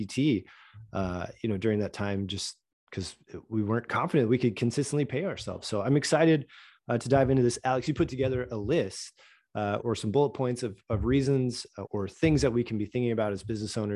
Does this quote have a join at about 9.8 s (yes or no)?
yes